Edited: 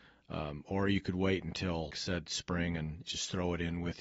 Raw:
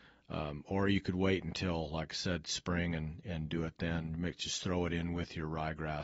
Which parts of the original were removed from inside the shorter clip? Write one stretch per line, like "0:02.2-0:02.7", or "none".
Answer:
0:01.9-0:02.1
0:03.2-0:04.4